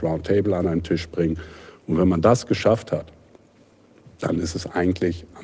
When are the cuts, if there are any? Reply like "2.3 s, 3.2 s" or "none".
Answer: none